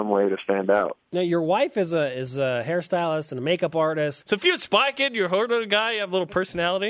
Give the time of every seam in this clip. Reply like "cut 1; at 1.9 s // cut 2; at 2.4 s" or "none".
cut 1; at 4.2 s